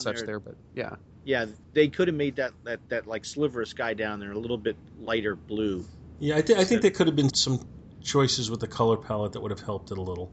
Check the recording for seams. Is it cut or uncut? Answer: cut